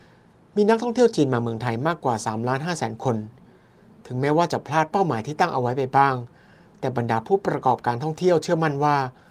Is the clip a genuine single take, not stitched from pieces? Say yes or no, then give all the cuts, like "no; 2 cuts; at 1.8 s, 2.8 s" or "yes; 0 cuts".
yes; 0 cuts